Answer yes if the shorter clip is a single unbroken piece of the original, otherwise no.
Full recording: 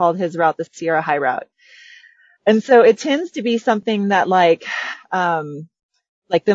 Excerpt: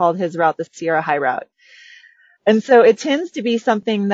yes